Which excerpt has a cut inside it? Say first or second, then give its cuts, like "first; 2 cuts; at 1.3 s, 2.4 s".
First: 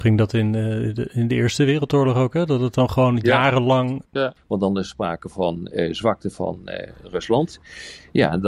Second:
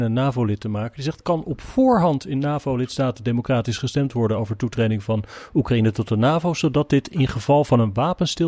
first; 1 cut; at 4.4 s